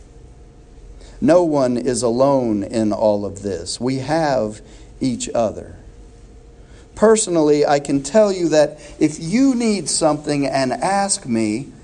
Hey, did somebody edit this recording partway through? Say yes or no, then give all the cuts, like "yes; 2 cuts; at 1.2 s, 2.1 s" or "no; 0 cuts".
no; 0 cuts